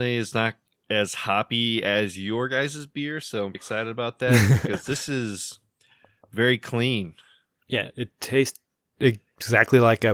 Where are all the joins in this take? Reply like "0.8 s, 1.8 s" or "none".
3.5 s